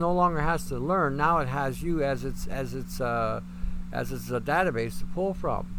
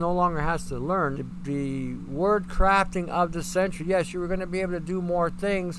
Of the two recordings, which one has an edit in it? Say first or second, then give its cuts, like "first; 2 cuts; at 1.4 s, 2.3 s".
second; 1 cut; at 1.2 s